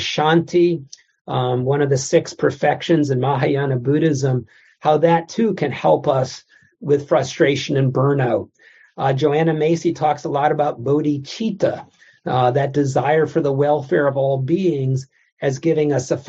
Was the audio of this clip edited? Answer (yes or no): no